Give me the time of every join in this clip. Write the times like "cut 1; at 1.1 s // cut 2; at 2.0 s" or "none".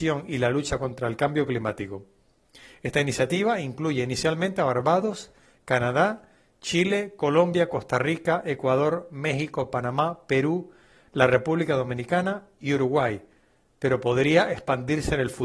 none

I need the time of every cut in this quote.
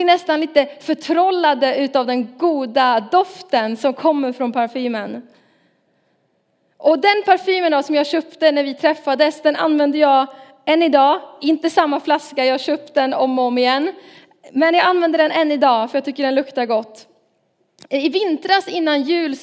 none

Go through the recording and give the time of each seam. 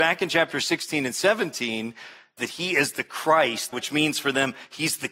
cut 1; at 2.4 s // cut 2; at 3.7 s

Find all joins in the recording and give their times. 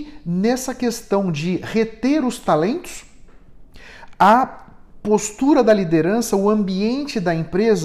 none

